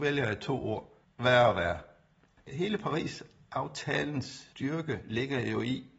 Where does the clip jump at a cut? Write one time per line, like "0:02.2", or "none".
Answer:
0:01.0

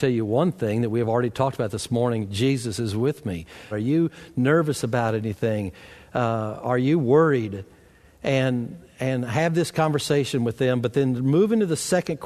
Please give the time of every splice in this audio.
0:03.7

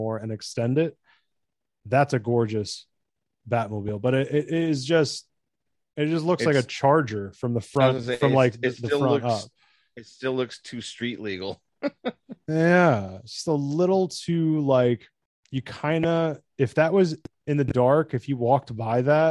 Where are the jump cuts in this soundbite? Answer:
none

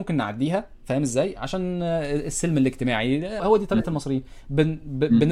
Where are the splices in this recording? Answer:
0:03.4

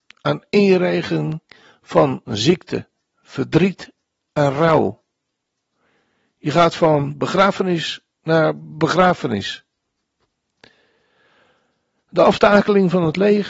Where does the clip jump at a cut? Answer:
none

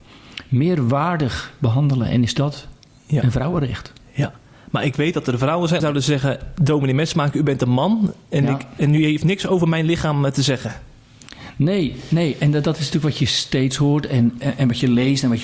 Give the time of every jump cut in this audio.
0:05.8

